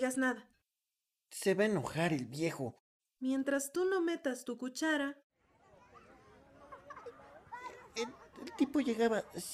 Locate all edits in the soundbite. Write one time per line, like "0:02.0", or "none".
0:03.0